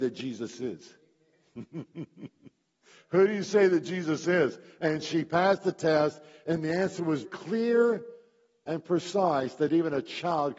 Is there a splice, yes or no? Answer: yes